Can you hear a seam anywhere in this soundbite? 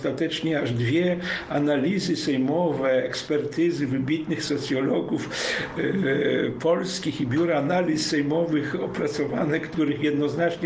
no; 0 cuts

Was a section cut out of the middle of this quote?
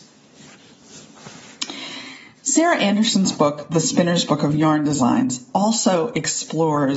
no; 0 cuts

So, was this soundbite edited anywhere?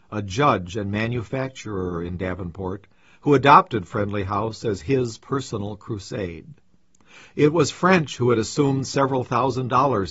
no; 0 cuts

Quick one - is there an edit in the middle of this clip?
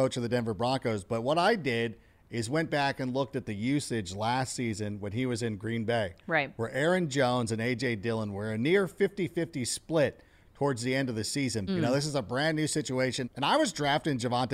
yes; 2 cuts; at 11.7 s, 13.2 s

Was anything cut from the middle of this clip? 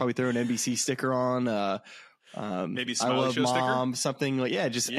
no; 0 cuts

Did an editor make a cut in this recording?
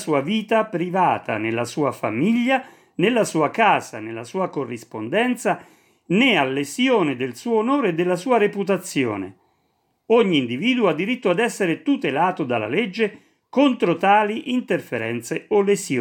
no; 0 cuts

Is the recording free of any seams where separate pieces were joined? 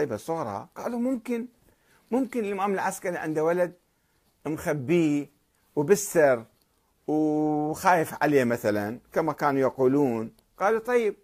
yes; 0 cuts

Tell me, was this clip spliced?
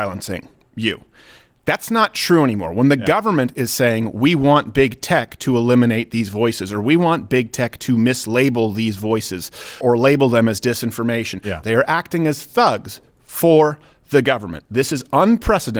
yes; 2 cuts; at 9.8 s, 11.6 s

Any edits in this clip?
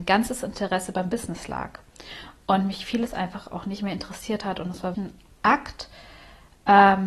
yes; 1 cut; at 4.9 s

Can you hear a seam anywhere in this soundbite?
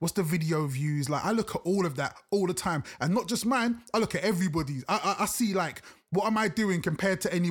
no; 0 cuts

